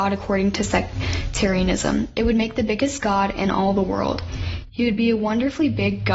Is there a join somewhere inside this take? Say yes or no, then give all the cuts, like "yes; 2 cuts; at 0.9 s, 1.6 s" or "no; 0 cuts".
no; 0 cuts